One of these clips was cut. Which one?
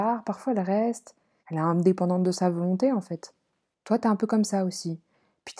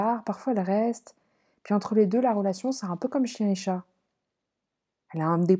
first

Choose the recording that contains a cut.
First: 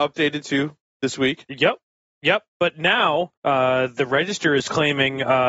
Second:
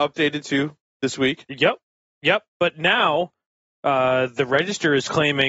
first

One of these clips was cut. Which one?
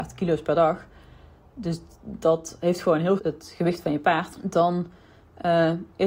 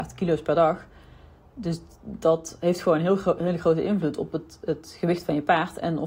first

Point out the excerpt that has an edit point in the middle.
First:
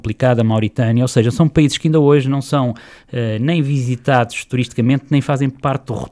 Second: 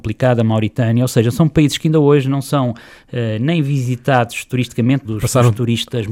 second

